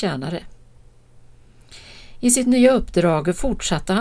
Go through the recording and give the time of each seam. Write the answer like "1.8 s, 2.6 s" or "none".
none